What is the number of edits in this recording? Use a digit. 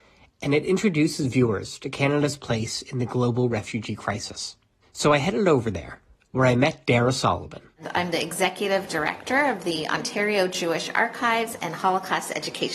0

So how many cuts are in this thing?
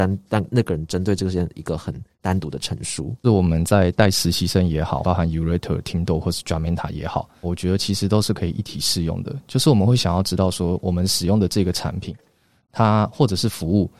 3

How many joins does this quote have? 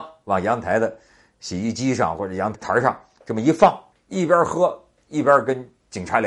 2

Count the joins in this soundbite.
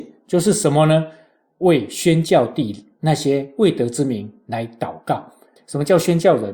1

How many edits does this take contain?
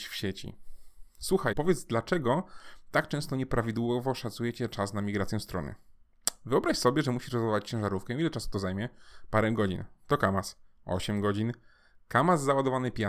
1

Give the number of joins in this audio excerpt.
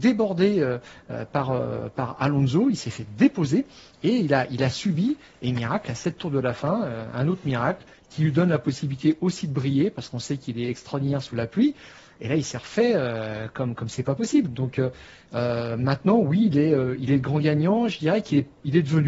0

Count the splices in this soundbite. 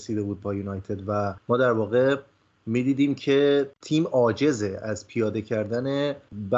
0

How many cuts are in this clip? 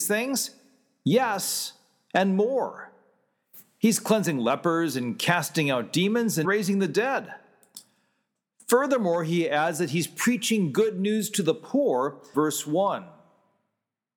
2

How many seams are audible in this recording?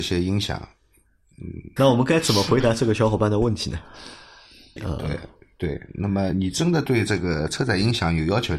2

